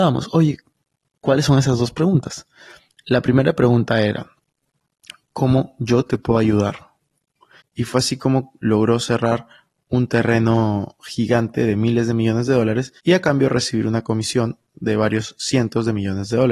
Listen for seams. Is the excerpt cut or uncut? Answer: cut